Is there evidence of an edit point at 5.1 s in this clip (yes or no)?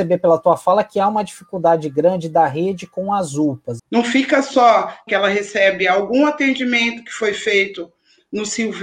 yes